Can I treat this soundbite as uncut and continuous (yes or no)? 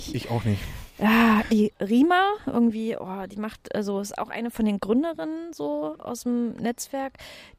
no